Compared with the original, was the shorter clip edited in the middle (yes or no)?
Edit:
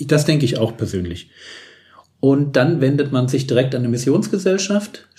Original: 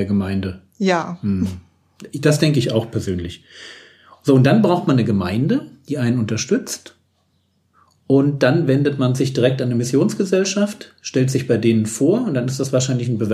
yes